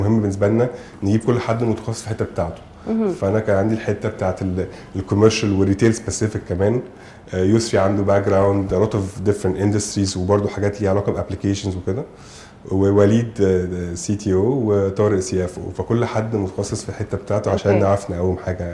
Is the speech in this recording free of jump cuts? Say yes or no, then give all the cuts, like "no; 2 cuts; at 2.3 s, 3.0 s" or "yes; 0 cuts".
yes; 0 cuts